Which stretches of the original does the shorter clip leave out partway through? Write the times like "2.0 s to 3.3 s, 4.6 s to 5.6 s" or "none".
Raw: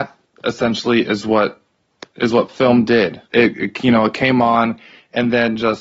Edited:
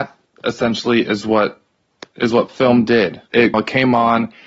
3.5 s to 4.0 s

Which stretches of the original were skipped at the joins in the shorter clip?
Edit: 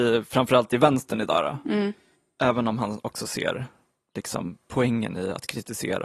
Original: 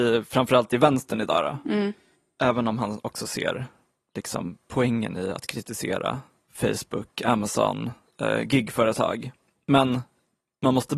none

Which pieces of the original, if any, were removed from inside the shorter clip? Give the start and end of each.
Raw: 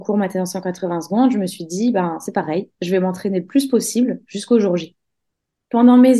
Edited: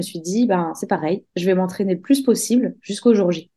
none

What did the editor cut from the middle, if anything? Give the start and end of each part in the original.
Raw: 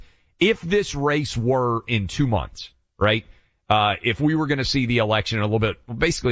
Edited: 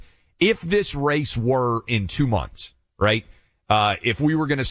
none

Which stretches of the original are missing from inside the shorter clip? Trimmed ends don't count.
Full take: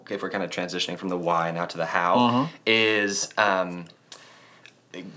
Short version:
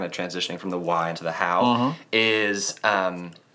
1.5 s to 1.7 s

